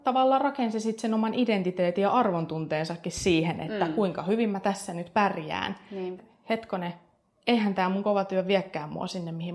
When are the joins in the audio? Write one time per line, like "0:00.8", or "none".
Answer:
0:06.2